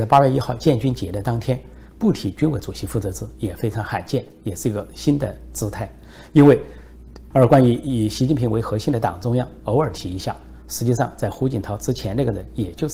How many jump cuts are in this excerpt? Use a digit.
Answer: 1